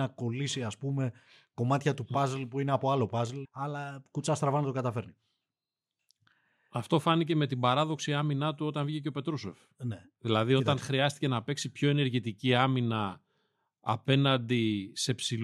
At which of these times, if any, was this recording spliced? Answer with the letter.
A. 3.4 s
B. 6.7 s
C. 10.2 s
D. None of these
A